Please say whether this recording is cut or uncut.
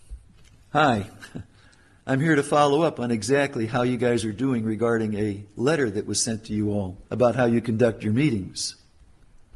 cut